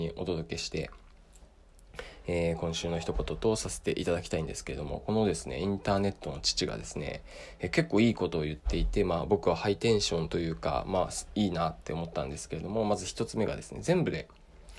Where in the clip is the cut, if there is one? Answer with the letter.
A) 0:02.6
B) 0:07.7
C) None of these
C